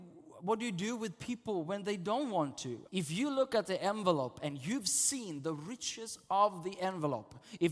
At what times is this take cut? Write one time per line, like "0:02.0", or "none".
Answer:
0:02.9